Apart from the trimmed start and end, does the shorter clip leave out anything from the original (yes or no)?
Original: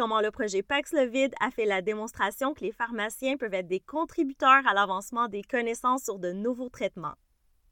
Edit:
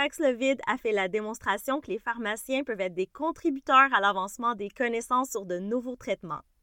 no